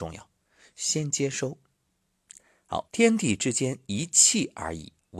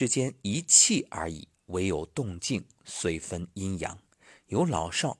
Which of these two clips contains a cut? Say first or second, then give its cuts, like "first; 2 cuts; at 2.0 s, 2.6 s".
first; 1 cut; at 2.9 s